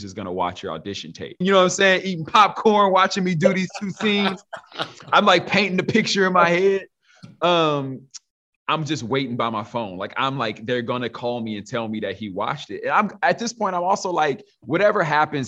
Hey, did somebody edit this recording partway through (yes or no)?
yes